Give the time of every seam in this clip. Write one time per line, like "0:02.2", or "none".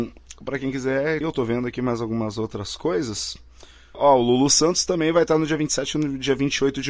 0:01.2
0:03.9